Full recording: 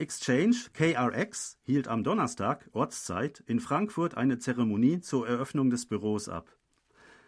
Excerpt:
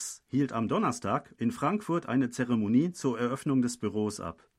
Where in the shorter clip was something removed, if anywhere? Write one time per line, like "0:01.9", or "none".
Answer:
0:01.4

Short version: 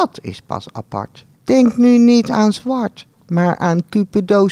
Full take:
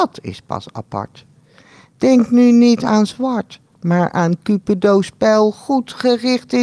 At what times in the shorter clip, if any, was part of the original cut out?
0:01.3

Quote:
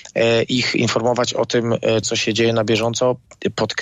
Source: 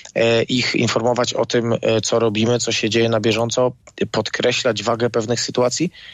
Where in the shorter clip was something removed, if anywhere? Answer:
0:02.0

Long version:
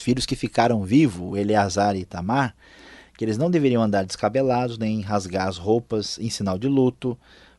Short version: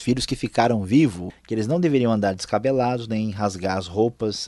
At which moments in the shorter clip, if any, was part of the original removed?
0:01.3

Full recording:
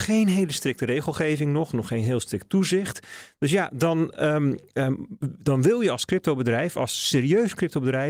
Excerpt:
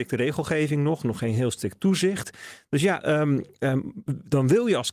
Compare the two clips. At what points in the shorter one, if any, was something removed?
0:03.0

